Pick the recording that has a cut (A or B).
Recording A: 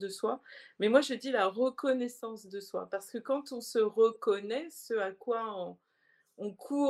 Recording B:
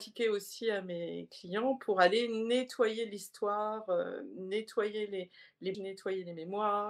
B